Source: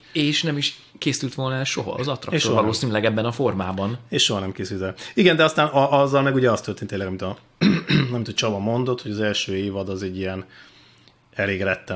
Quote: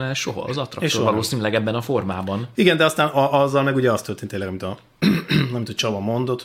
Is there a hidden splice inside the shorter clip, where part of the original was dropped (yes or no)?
yes